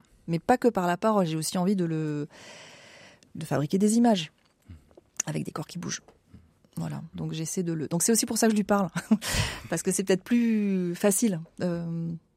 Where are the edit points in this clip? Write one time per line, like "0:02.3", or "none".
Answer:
0:07.1